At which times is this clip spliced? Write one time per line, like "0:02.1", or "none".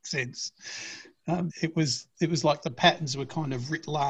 0:01.5